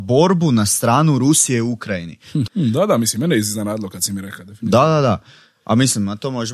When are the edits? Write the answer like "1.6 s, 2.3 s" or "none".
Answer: 2.5 s

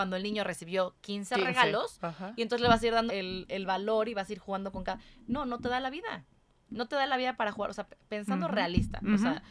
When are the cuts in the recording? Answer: 3.1 s

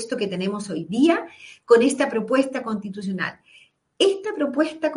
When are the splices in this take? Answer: none

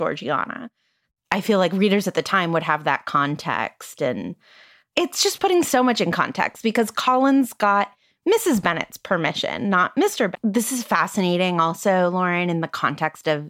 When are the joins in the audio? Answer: 10.3 s

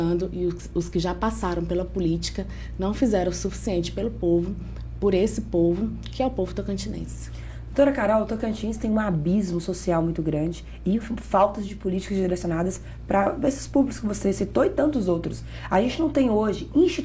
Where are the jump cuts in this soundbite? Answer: none

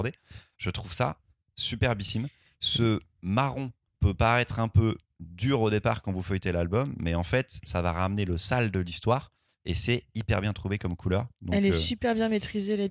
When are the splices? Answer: 3.9 s

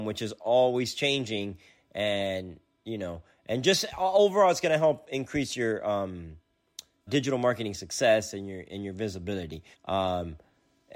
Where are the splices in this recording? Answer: 7.1 s, 9.7 s

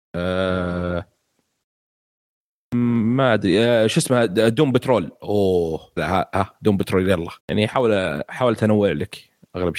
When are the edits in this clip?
6.0 s, 7.4 s

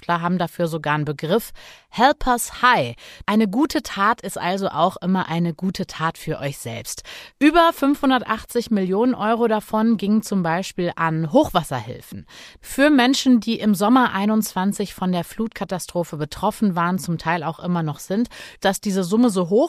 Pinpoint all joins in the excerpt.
7.3 s

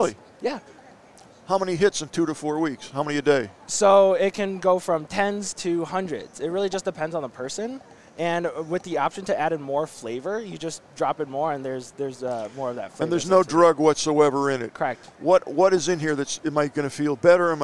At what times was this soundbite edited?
none

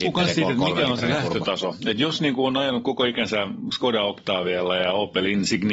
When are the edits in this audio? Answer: none

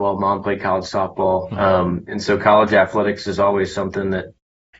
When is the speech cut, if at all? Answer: 1.5 s

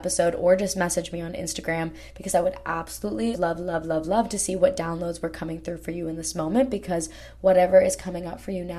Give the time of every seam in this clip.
3.3 s

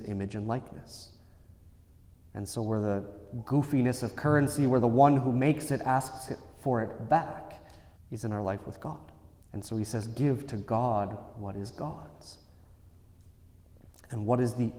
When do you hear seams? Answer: 8.0 s, 9.4 s

